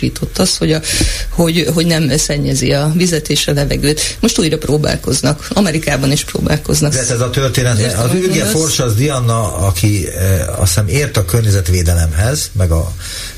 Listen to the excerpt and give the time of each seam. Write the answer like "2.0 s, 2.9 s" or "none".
6.9 s